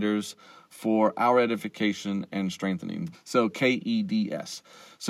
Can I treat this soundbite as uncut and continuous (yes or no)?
no